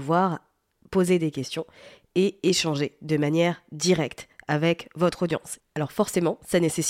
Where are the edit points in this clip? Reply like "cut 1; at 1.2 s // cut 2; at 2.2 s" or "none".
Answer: cut 1; at 5.6 s